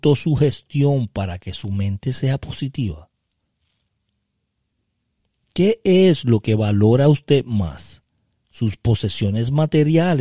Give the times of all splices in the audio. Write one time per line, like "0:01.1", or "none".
none

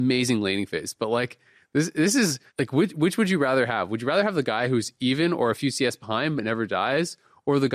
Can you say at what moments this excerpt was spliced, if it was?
0:02.5

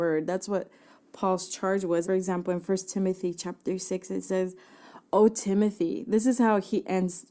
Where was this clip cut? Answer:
0:02.0

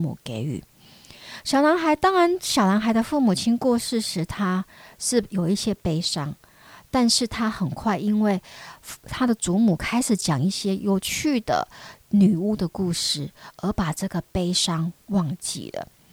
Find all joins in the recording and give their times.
none

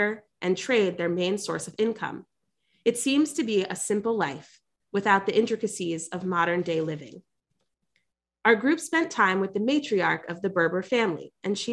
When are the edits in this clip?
none

